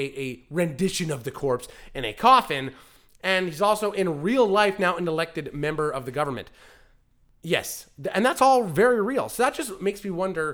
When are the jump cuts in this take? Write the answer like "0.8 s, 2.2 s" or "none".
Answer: none